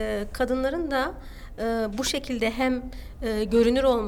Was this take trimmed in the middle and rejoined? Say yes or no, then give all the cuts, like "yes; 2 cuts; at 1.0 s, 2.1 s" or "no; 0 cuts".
no; 0 cuts